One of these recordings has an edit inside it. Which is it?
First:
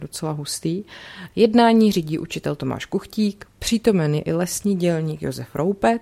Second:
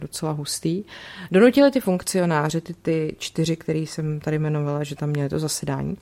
first; 1 cut; at 1.3 s

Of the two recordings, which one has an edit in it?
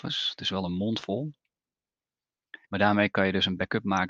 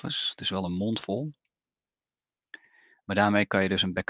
first; 1 cut; at 2.6 s

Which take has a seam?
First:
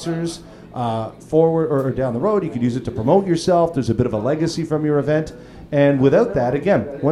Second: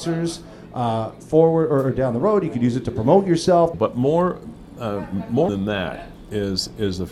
second; 2 cuts; at 3.7 s, 5.5 s

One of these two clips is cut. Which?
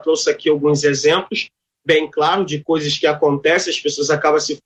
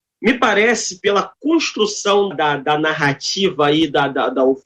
second; 1 cut; at 2.3 s

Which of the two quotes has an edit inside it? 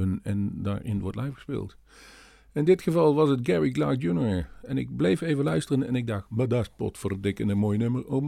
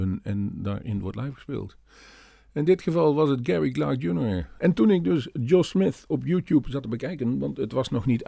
second; 1 cut; at 4.6 s

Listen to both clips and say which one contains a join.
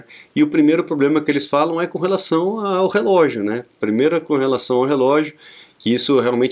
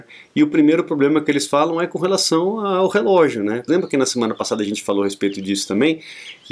second; 1 cut; at 3.7 s

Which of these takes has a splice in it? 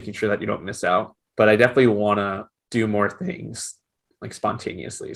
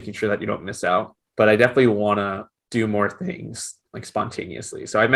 second; 1 cut; at 3.8 s

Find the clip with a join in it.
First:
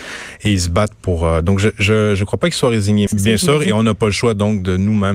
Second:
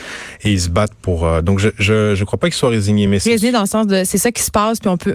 first; 1 cut; at 3.1 s

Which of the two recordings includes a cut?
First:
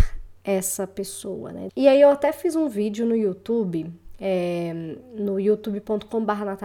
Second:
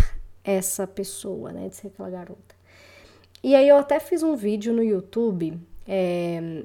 first; 1 cut; at 1.7 s

